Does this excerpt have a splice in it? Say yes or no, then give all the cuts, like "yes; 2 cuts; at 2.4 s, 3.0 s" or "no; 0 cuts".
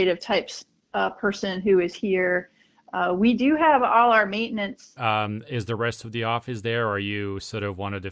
yes; 1 cut; at 5.0 s